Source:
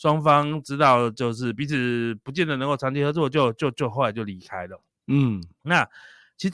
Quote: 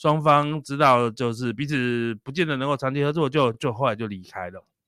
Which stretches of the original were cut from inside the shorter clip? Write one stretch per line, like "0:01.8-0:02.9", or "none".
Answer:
0:03.5-0:03.7